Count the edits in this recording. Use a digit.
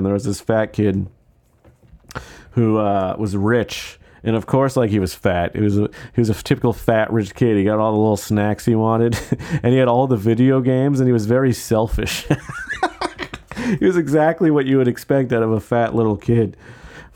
0